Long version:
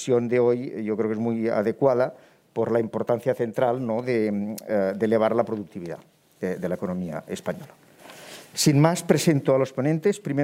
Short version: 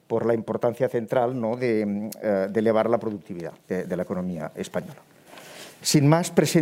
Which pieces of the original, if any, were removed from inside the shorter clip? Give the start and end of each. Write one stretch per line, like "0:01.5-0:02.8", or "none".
0:06.0-0:06.3